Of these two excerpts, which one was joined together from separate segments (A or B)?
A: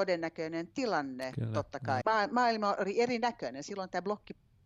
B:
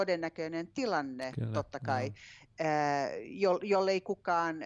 A